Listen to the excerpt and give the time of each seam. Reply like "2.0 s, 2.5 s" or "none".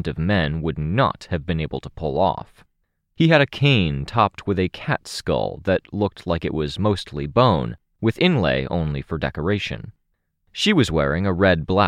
10.3 s